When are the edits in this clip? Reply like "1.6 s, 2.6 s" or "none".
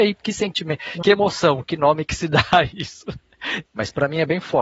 3.7 s